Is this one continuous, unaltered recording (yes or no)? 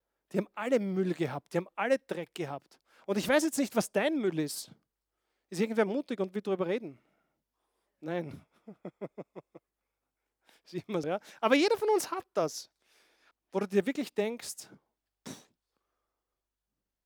no